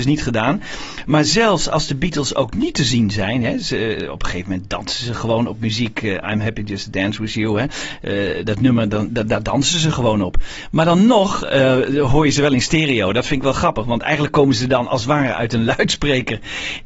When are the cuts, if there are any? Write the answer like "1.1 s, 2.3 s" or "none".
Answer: none